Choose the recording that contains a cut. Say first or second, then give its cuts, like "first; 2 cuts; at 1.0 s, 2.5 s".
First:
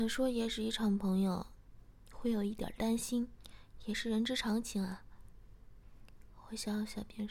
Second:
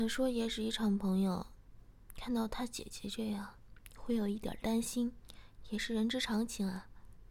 first; 1 cut; at 2.0 s